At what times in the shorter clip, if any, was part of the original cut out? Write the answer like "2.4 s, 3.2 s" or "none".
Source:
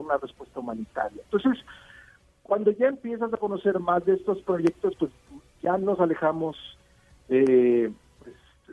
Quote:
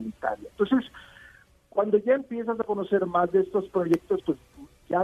none